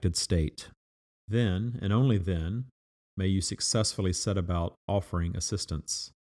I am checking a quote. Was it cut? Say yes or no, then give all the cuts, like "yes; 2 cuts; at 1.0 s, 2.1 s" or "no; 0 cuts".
no; 0 cuts